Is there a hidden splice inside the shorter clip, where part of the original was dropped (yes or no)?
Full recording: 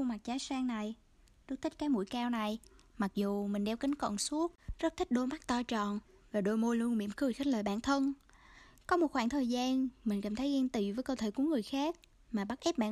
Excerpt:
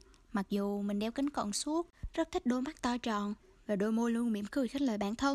no